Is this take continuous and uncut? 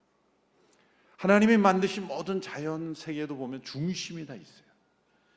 yes; 0 cuts

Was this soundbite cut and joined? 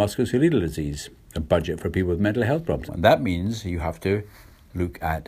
yes; 1 cut; at 2.9 s

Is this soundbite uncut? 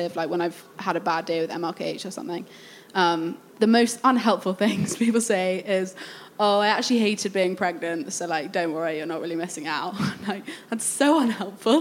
yes; 0 cuts

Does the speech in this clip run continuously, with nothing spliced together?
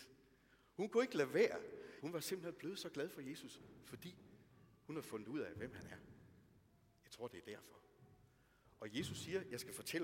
no; 1 cut; at 2.0 s

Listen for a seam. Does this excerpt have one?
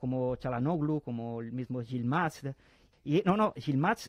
yes; 1 cut; at 2.9 s

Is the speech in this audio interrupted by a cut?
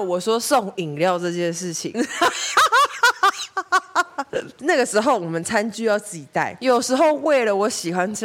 yes; 1 cut; at 1.9 s

